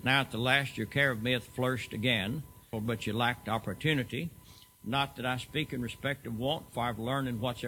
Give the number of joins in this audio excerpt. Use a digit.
1